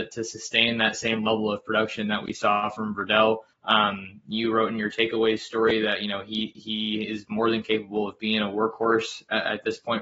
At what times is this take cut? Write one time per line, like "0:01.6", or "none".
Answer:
0:03.5